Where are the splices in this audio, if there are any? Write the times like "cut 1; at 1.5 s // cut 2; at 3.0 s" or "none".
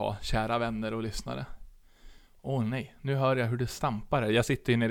none